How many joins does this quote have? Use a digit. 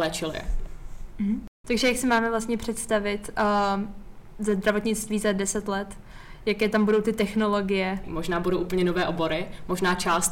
2